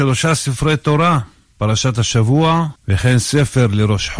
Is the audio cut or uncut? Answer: cut